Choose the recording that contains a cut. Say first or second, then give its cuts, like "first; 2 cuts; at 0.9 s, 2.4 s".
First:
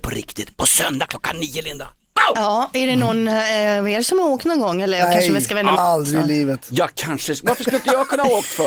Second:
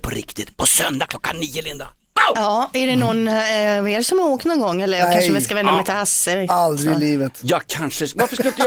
first; 1 cut; at 5.7 s